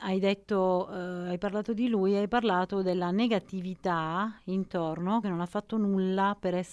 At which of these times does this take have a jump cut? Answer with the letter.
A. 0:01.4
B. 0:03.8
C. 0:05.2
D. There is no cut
C